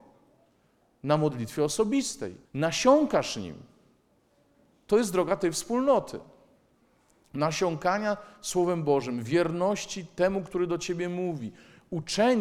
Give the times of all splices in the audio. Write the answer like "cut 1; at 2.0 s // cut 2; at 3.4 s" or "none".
cut 1; at 2.5 s